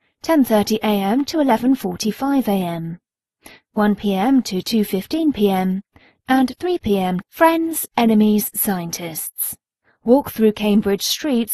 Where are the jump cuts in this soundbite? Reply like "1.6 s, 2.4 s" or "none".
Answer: 7.2 s